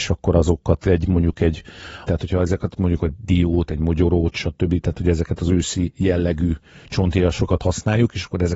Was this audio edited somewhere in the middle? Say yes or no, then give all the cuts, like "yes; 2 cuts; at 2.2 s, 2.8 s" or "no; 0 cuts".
yes; 1 cut; at 2.1 s